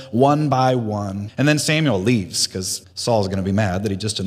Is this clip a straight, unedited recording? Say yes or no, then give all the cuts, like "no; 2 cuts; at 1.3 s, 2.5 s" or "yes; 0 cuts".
no; 2 cuts; at 1.3 s, 2.8 s